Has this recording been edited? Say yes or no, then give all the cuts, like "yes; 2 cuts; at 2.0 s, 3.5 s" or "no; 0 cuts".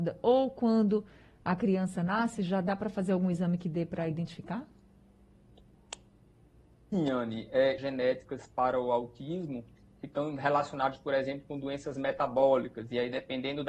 yes; 1 cut; at 7.8 s